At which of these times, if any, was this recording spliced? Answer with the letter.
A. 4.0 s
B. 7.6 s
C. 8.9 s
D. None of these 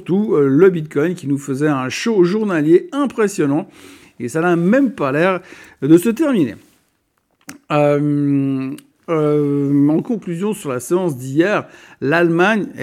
C